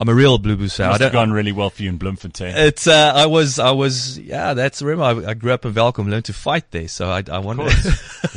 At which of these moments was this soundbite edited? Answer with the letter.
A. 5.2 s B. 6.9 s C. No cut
C